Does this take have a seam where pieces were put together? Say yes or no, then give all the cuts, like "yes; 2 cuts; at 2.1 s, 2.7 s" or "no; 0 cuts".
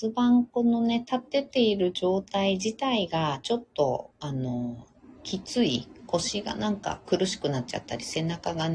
no; 0 cuts